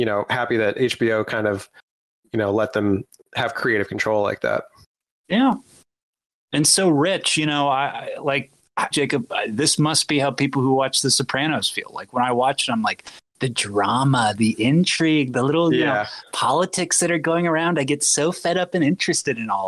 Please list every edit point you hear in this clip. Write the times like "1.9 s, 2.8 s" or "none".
8.9 s